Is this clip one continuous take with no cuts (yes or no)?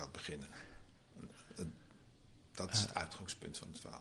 yes